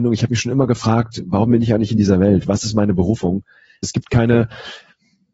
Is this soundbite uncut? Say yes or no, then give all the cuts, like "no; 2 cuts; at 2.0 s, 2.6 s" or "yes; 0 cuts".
no; 1 cut; at 3.8 s